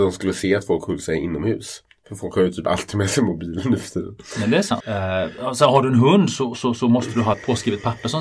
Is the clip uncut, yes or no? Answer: no